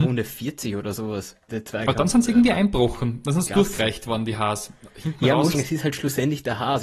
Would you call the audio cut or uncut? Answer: cut